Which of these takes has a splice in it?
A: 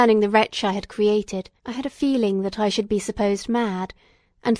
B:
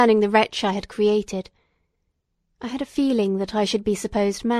A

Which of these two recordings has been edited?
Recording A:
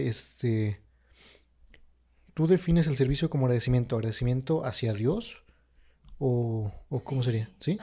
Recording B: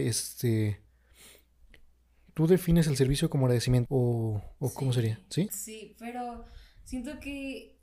B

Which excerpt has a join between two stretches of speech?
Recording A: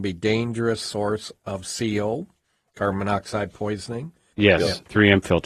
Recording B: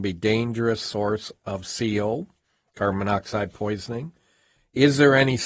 A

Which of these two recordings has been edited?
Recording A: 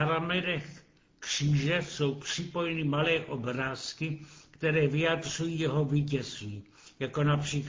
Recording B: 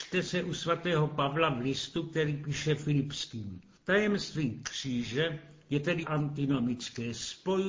B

